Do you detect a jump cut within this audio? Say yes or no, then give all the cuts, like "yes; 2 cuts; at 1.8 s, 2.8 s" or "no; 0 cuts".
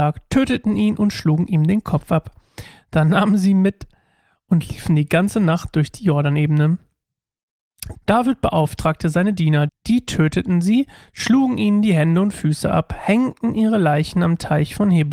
yes; 2 cuts; at 7.9 s, 9.7 s